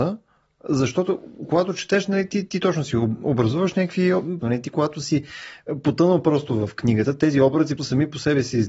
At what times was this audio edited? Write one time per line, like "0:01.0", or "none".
0:04.4
0:07.8